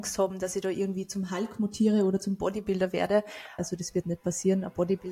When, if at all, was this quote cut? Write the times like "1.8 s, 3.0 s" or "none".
3.6 s